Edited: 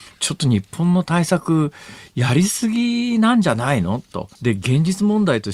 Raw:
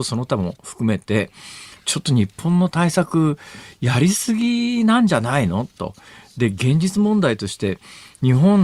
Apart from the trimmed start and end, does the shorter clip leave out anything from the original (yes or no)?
yes